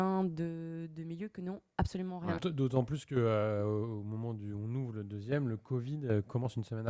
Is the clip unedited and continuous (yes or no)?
no